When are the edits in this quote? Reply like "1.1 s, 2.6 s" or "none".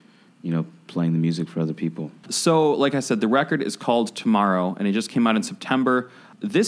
2.2 s